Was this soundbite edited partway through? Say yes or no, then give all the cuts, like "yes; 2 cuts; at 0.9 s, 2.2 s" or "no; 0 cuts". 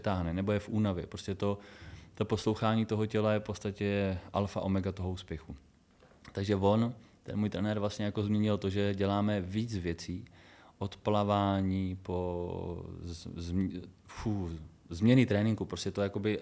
no; 0 cuts